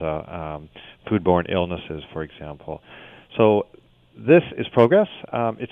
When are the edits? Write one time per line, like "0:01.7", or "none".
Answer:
none